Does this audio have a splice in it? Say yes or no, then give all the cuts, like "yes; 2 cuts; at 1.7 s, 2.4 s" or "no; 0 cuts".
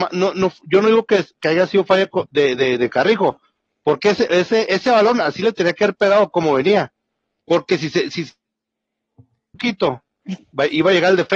no; 0 cuts